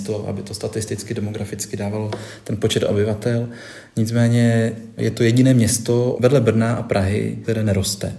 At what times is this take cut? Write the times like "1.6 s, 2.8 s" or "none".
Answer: none